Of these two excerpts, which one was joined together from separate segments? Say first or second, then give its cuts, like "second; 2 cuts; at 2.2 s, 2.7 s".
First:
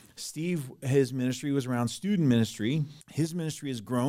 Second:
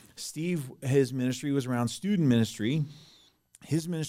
first; 1 cut; at 3.0 s